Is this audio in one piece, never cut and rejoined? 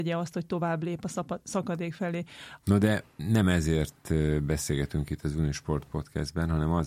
no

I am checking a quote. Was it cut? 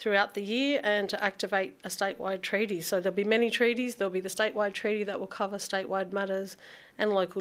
no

